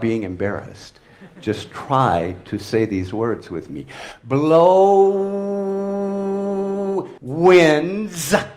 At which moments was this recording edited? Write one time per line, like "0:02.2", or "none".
0:07.2